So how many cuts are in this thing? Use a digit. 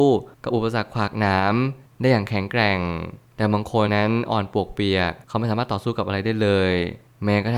1